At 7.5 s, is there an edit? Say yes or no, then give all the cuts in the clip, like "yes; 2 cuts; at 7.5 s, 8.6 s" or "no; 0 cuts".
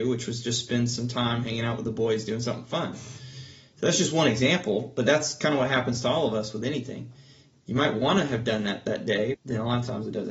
no; 1 cut; at 9.3 s